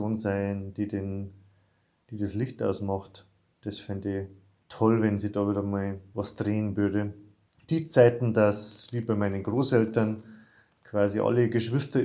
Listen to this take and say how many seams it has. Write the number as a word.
zero